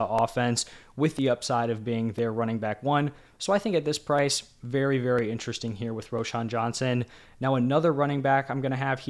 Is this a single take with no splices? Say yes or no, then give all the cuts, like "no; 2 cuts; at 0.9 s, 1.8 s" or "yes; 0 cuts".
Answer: yes; 0 cuts